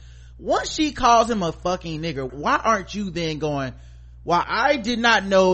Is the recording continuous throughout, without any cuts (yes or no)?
no